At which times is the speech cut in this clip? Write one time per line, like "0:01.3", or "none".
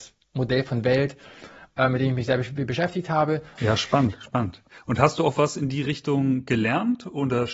0:03.6